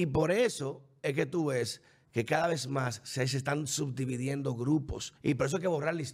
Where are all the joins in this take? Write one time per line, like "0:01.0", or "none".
0:05.2